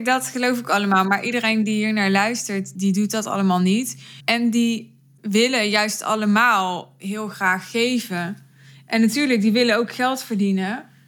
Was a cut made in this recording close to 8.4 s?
no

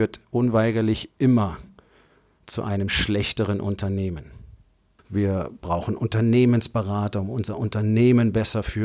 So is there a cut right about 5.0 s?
yes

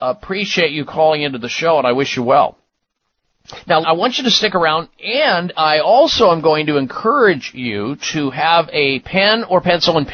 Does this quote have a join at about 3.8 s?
yes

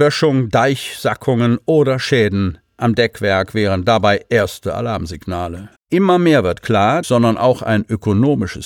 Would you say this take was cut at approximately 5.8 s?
yes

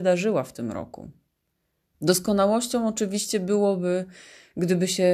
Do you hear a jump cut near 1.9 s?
yes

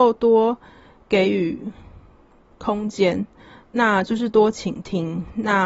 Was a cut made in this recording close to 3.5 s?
no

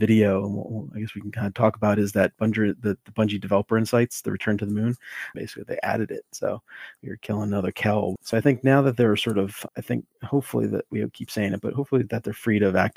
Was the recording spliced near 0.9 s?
no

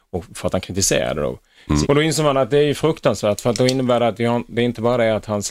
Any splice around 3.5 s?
no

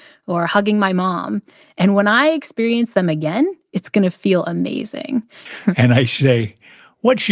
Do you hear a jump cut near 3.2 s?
no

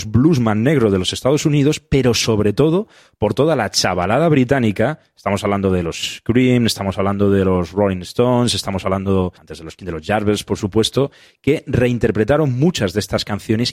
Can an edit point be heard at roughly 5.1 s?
no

